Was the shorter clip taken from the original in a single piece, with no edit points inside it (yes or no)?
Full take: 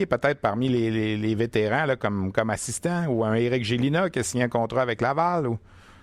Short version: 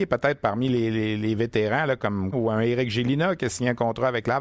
no